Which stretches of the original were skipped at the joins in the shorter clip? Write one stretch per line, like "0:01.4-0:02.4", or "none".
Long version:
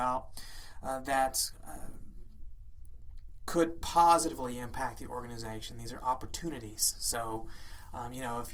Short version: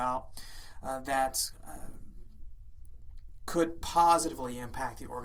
none